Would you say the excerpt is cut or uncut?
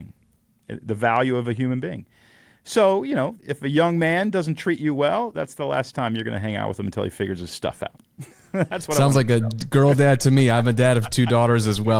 cut